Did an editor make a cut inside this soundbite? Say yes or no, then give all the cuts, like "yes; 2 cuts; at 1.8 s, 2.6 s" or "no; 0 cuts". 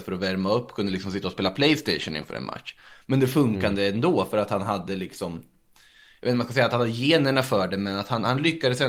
no; 0 cuts